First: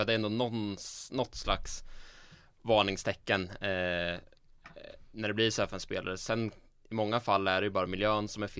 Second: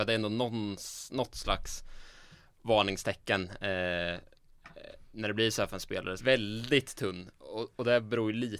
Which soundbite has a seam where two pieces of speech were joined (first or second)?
second